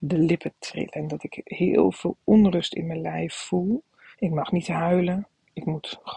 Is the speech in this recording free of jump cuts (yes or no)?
no